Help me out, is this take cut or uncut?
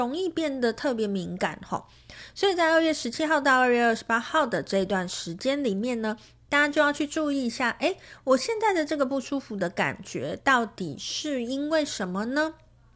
uncut